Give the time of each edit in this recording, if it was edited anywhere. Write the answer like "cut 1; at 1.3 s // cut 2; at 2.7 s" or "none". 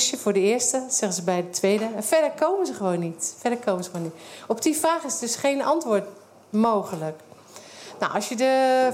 none